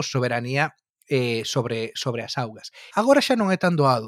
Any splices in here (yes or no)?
yes